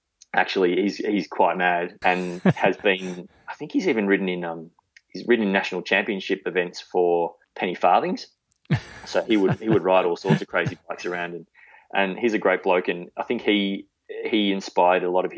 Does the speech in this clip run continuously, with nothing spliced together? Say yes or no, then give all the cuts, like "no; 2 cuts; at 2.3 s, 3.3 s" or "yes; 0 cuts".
no; 2 cuts; at 2.0 s, 7.4 s